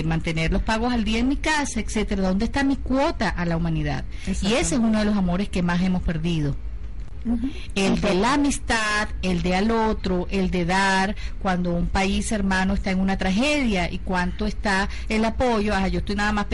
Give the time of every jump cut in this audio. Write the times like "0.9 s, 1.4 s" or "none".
none

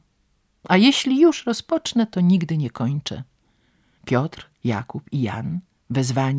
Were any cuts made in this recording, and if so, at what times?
4.0 s

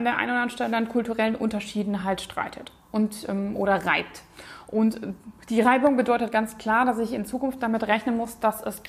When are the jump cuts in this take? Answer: none

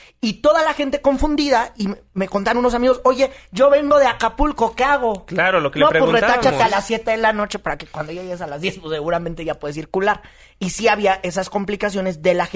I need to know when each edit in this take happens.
none

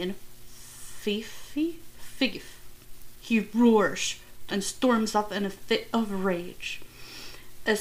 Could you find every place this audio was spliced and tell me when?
3.1 s, 4.5 s

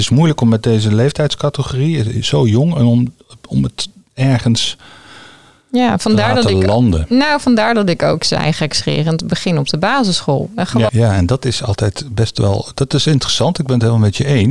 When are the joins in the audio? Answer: 10.9 s

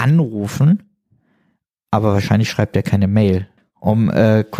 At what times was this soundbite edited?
3.6 s

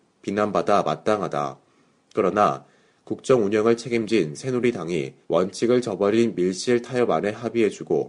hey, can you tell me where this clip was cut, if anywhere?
5.2 s

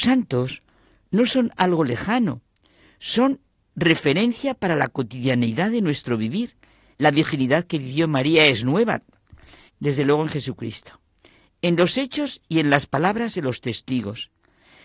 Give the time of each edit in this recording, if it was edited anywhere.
6.9 s, 9.7 s

